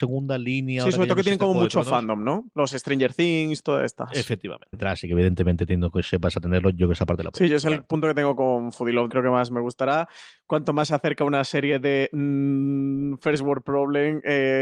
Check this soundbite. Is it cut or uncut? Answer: cut